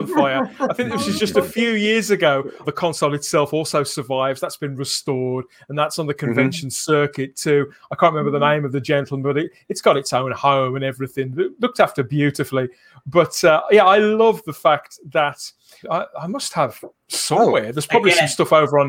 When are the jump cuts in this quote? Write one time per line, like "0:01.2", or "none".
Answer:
0:02.6
0:15.8